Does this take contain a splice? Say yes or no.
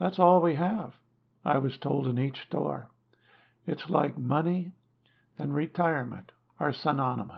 no